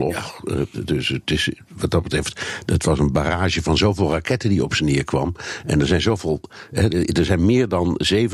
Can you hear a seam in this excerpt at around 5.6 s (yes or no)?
no